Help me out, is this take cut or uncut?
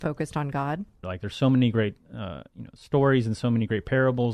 cut